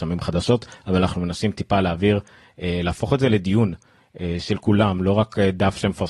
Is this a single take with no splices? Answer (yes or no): yes